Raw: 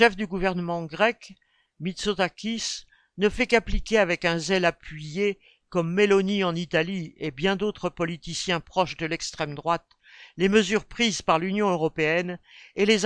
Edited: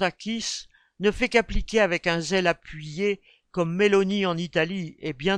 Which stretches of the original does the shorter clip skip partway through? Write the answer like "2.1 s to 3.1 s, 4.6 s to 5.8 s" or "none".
none